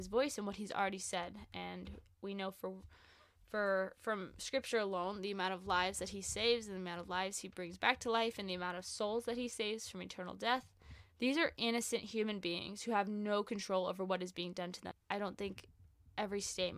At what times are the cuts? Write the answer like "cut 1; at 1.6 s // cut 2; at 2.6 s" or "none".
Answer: cut 1; at 11.1 s // cut 2; at 14.9 s

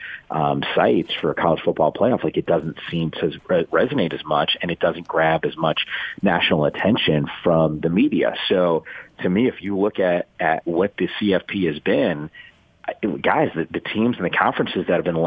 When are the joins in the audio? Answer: none

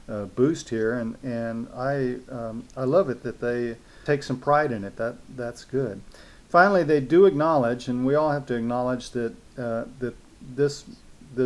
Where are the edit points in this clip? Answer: none

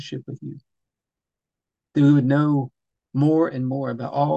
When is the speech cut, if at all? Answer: none

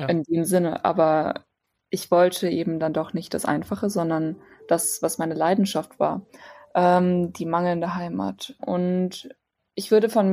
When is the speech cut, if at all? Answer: cut 1; at 8.6 s

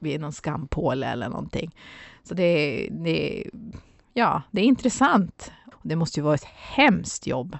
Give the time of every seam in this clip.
cut 1; at 5.7 s

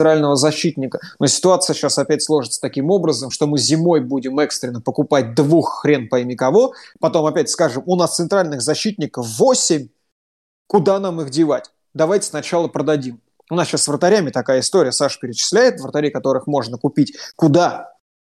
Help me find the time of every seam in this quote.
none

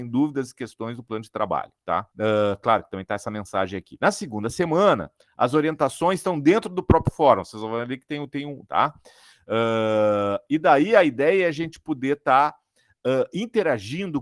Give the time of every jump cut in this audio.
cut 1; at 2.1 s // cut 2; at 8.7 s

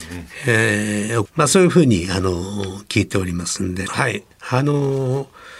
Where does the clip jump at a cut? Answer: cut 1; at 1.3 s // cut 2; at 3.9 s

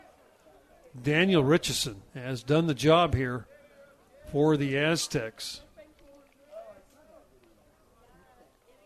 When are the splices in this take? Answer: cut 1; at 2.1 s

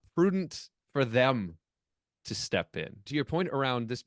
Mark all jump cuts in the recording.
cut 1; at 3.1 s

